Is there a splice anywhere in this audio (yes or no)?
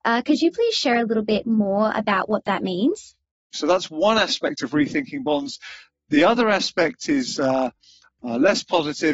yes